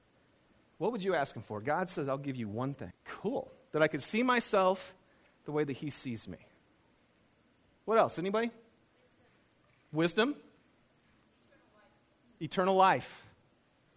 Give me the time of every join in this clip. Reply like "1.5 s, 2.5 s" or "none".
2.9 s